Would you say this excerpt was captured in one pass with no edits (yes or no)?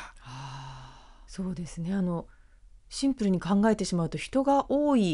no